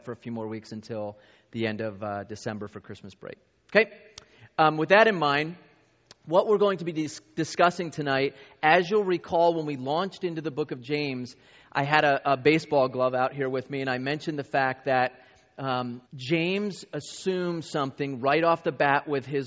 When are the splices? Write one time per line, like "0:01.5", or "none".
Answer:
0:16.1

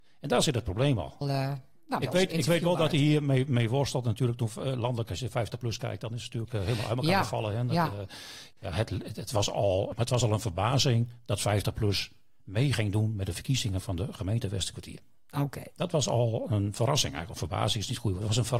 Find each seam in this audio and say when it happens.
0:01.2
0:08.6
0:09.9

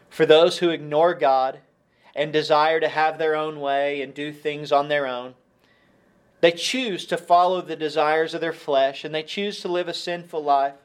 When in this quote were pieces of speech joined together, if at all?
none

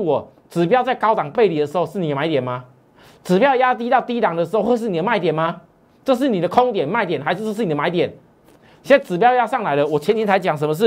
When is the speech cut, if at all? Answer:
none

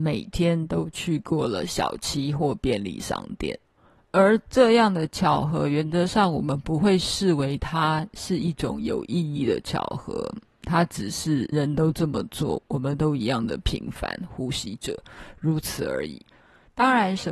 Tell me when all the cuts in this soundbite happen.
0:11.5

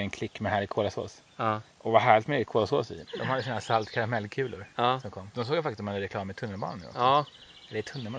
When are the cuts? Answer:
0:01.7
0:03.1
0:05.3

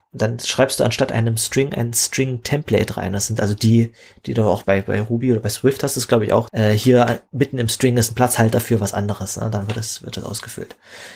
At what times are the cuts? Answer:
0:04.6
0:06.5

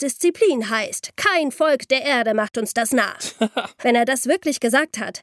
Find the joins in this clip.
0:03.8

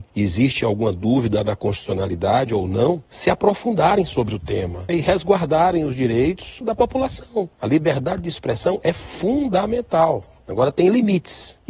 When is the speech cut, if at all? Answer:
none

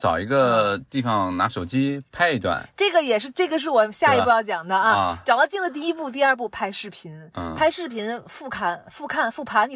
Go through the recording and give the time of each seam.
none

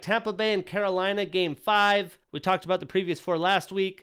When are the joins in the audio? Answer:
0:02.2

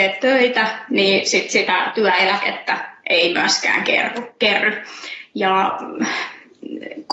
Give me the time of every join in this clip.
none

